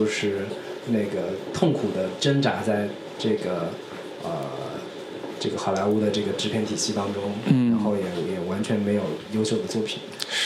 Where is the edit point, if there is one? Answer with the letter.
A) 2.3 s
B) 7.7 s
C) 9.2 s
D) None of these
D